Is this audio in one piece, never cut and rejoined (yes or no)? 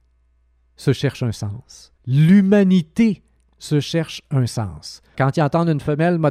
no